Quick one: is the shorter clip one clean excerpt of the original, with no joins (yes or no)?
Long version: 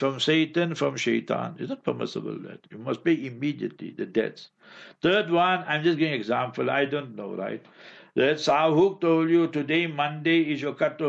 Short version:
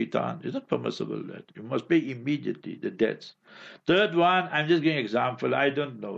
yes